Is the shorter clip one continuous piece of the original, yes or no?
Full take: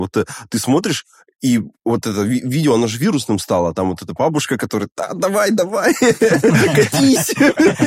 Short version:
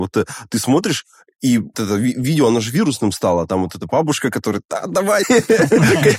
no